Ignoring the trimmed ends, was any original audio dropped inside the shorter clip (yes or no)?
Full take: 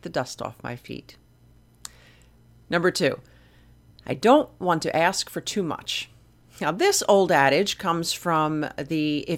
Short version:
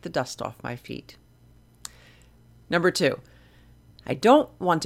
no